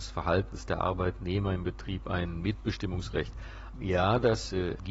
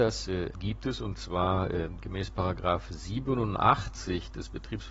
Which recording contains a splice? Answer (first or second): first